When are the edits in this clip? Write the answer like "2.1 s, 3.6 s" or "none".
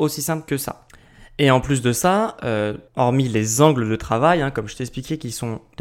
2.9 s